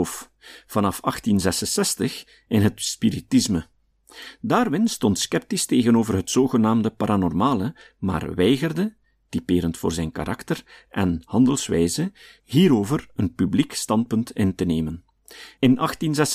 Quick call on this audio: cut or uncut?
uncut